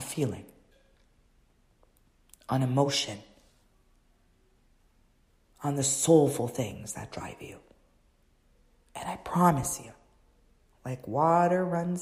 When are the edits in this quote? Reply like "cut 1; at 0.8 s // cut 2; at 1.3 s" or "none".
none